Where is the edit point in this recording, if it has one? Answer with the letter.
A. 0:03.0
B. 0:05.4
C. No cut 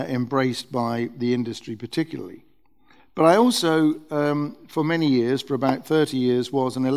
A